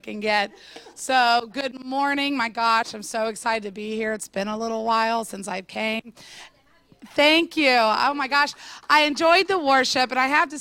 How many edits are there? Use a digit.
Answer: 0